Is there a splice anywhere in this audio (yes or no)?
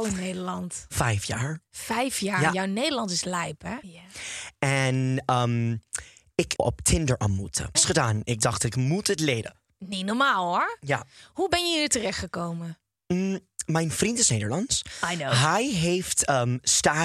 yes